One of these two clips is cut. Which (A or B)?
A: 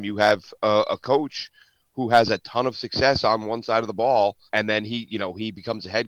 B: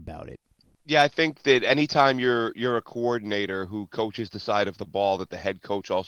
A